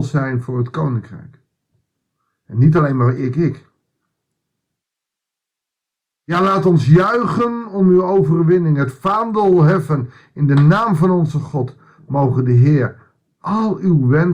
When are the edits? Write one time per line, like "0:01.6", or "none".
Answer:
0:03.2